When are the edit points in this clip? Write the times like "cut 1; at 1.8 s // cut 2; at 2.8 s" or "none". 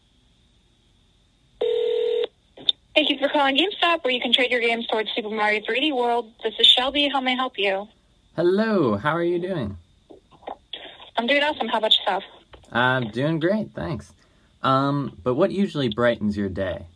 cut 1; at 15.2 s